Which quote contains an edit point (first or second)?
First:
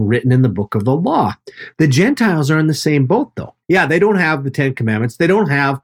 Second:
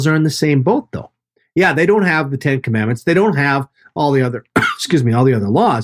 first